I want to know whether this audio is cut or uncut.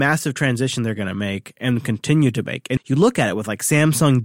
cut